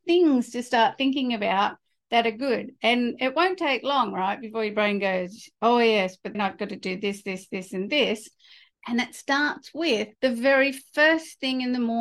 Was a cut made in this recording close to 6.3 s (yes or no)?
yes